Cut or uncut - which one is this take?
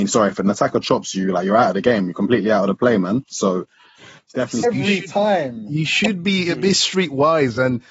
cut